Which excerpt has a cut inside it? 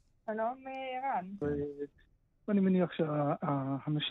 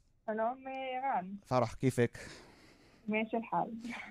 first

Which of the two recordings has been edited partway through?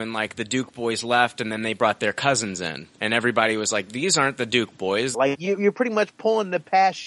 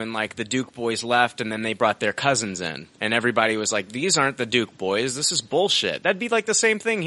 first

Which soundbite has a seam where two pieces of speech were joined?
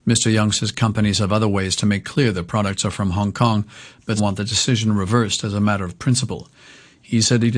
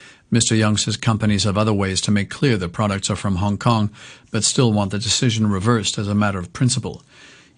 first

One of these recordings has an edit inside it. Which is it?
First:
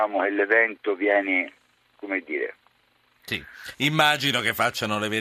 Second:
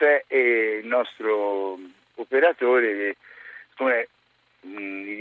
first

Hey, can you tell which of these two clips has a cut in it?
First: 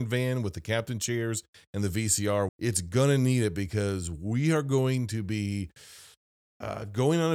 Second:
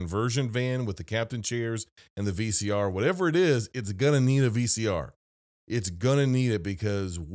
first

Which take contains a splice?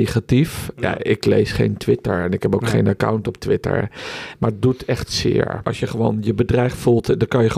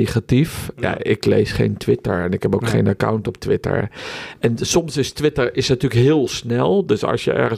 first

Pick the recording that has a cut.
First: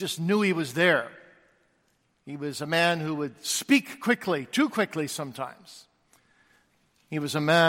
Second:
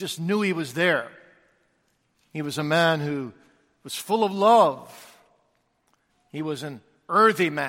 second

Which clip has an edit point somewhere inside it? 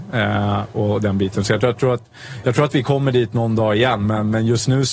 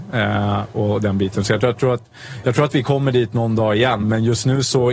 second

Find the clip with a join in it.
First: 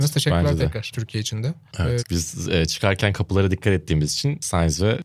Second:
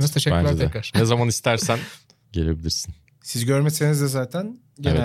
first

